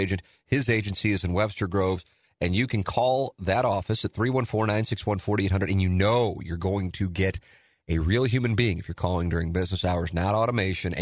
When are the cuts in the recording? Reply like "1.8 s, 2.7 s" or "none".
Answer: none